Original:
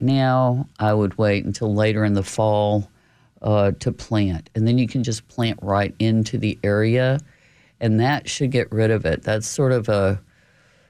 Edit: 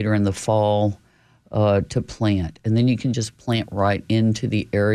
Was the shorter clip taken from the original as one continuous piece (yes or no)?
yes